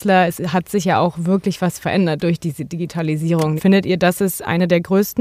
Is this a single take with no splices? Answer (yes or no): no